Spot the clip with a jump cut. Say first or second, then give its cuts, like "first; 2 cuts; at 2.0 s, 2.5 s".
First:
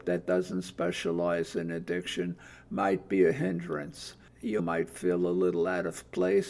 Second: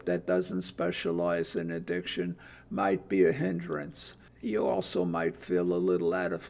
first; 1 cut; at 4.6 s